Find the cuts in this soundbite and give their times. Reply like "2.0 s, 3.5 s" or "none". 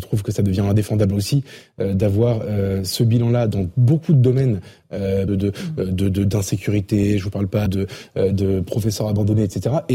5.3 s, 7.7 s